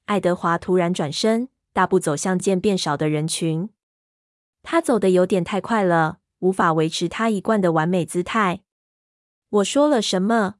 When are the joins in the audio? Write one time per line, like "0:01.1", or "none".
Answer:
0:02.4